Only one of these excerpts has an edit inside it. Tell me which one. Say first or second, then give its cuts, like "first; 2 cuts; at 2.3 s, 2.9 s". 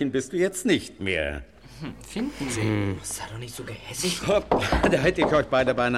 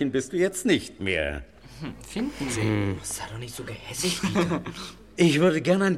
first; 1 cut; at 4.2 s